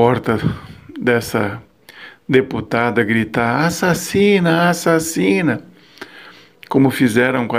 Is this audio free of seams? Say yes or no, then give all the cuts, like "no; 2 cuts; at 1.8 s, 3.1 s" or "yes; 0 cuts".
yes; 0 cuts